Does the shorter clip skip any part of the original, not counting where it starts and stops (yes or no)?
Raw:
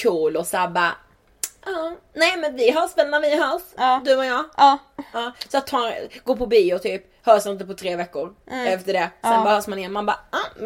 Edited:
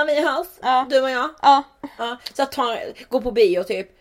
no